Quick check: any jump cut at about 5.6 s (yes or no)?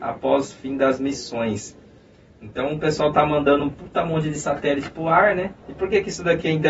yes